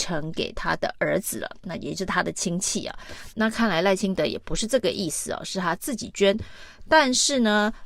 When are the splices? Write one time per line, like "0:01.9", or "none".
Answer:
0:03.3